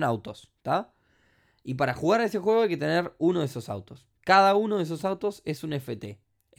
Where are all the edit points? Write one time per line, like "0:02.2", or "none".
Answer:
none